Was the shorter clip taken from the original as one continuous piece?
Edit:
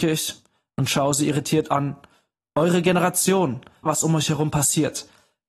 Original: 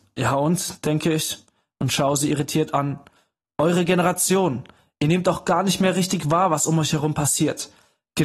no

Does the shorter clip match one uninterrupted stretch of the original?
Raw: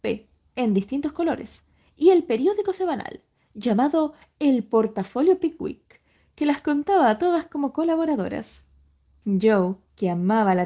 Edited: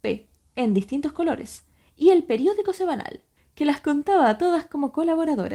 no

